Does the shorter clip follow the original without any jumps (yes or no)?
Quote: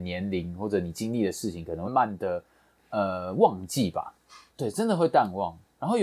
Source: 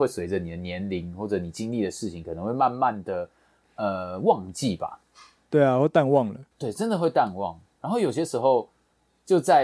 no